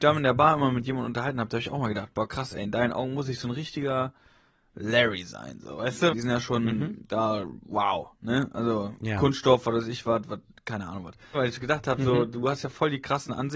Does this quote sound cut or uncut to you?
cut